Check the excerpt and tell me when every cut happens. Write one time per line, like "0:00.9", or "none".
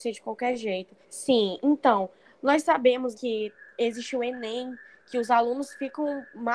0:01.0
0:03.1